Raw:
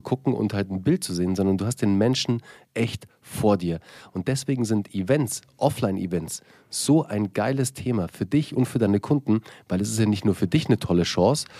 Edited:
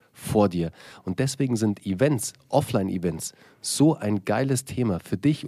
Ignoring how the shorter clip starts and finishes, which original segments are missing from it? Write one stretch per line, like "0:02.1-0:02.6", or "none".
none